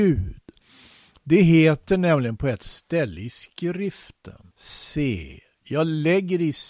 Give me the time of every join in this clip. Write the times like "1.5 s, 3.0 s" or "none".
4.5 s